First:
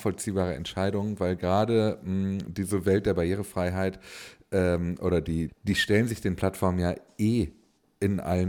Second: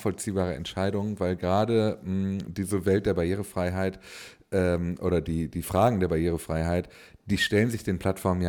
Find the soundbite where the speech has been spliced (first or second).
first